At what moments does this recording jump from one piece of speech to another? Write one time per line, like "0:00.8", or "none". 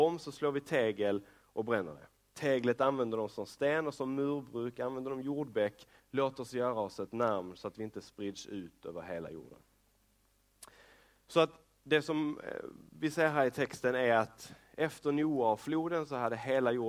0:06.0